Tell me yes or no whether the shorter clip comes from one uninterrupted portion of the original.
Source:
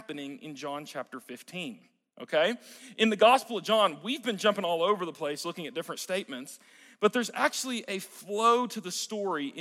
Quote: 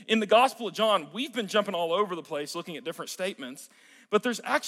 yes